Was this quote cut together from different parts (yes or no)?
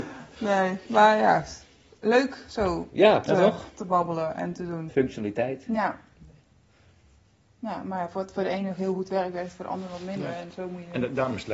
yes